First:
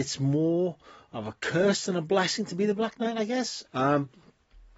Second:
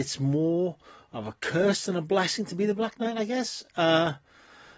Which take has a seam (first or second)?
first